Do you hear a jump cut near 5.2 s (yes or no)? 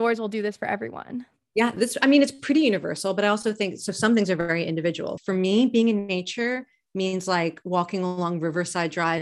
yes